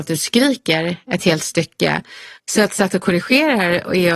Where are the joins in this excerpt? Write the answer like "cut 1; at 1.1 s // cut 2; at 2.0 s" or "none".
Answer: cut 1; at 2.3 s